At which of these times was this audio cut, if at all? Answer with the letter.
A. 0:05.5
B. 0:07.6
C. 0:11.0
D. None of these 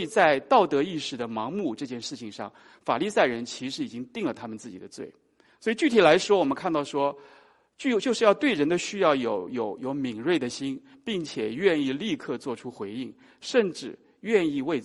A